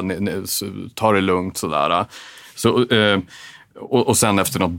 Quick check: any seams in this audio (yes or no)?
no